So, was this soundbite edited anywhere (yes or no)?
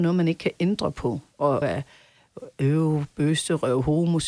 yes